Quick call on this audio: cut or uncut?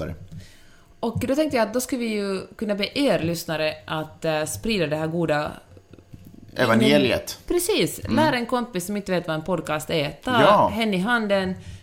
uncut